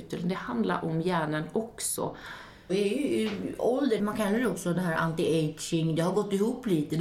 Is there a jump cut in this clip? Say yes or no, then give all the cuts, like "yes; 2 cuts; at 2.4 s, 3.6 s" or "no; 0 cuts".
yes; 2 cuts; at 2.7 s, 4.0 s